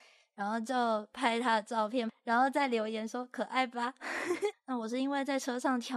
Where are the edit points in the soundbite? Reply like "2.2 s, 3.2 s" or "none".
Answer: 2.1 s, 4.5 s

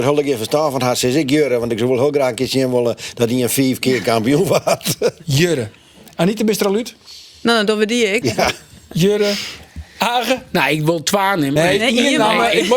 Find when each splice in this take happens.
8.2 s, 11.6 s

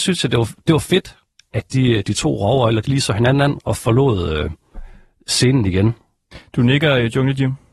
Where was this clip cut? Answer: none

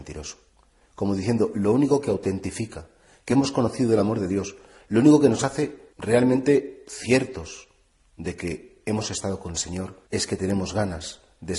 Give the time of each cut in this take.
5.9 s, 10.1 s

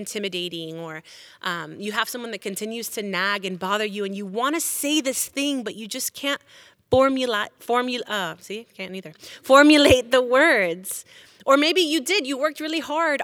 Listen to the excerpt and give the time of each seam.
none

